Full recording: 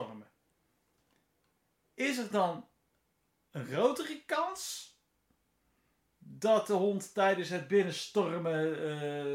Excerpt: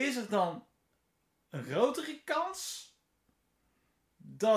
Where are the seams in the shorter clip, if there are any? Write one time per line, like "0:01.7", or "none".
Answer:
none